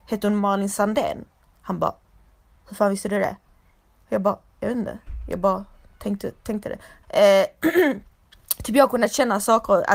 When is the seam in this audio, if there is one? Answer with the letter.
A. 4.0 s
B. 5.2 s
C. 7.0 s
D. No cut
C